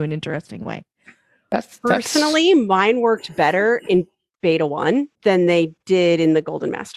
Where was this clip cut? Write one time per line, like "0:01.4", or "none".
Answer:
0:05.1